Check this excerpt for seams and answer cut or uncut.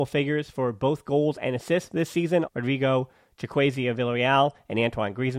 cut